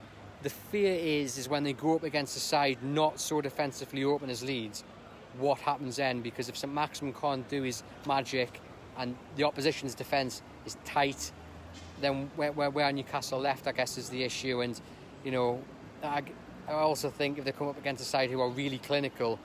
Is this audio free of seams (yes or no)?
yes